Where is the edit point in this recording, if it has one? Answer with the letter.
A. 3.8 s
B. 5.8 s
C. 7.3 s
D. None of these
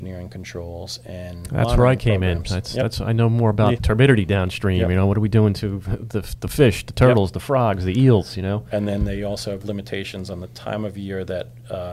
A